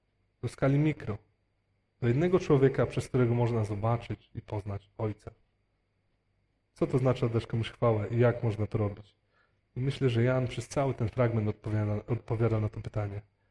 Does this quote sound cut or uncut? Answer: cut